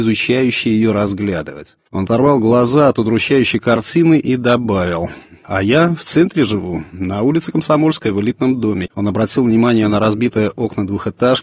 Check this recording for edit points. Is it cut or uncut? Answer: cut